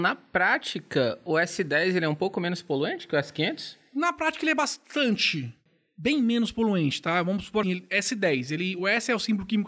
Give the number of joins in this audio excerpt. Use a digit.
1